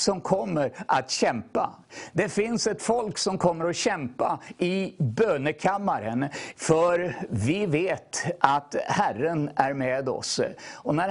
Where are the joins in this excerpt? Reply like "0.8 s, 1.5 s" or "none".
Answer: 6.5 s